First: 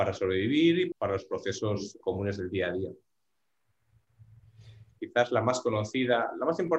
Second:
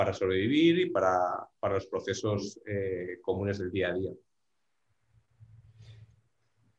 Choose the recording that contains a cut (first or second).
first